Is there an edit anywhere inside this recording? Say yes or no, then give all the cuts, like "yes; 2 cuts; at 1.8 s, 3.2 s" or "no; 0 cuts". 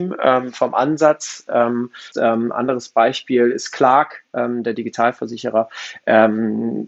yes; 1 cut; at 2.1 s